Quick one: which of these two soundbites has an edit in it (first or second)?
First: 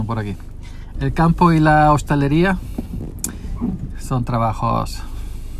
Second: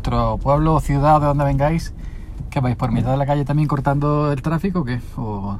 first